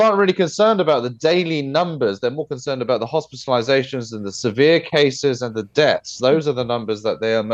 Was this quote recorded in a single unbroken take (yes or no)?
yes